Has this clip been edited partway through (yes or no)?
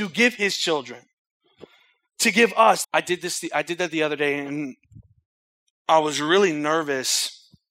yes